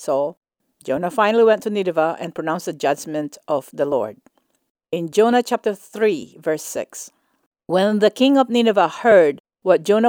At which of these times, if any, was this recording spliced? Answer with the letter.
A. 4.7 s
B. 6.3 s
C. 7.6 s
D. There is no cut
D